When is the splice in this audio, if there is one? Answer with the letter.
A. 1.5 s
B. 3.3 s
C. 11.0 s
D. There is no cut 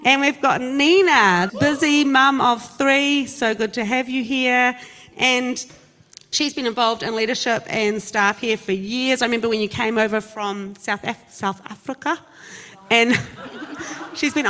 A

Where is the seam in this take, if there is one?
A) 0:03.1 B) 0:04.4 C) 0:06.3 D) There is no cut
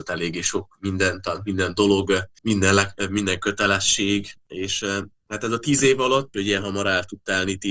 C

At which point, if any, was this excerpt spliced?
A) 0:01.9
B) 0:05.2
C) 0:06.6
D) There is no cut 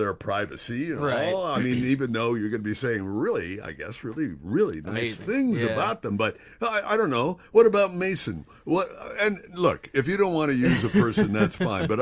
D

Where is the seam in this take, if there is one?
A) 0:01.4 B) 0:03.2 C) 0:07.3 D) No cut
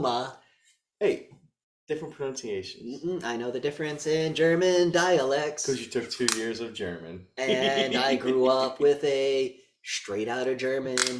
D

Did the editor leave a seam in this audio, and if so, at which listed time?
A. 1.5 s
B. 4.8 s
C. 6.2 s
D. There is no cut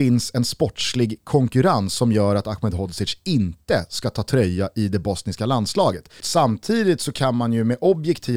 C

